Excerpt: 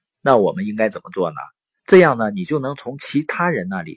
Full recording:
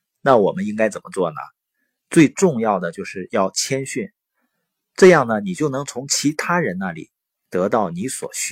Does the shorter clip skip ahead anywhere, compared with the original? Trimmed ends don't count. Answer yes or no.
yes